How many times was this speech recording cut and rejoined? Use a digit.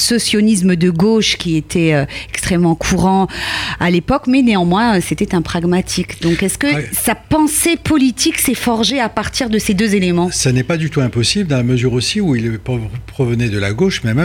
0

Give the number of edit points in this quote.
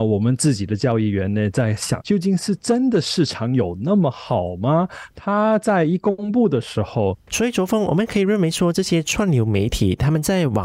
3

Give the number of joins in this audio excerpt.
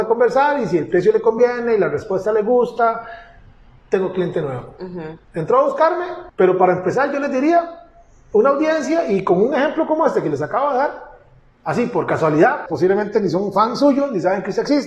2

